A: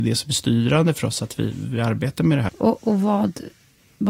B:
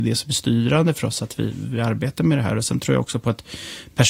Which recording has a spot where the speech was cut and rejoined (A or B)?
A